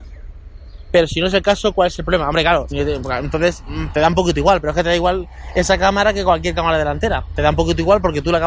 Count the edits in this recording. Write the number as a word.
one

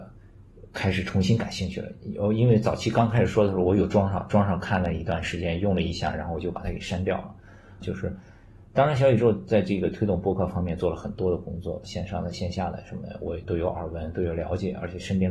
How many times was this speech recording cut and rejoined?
three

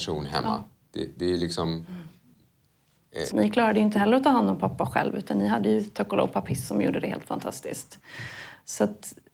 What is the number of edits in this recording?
one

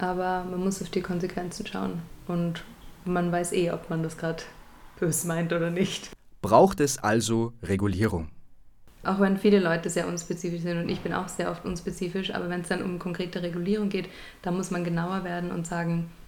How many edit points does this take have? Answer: zero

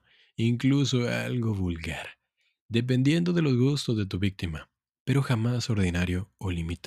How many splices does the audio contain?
zero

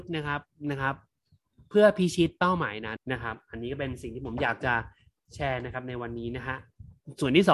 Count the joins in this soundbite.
one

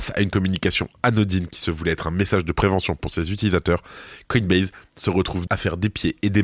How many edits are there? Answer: one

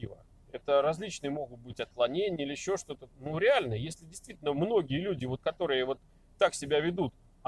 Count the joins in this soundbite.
one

